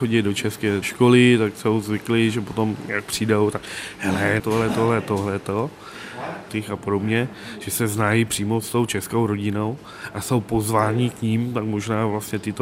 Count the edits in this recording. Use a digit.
2